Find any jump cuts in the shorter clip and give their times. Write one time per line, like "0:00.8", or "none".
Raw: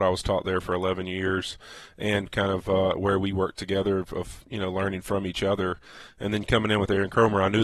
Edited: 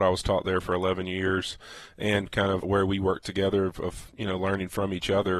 0:02.6